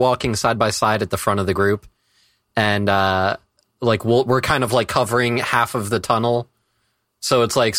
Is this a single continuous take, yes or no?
yes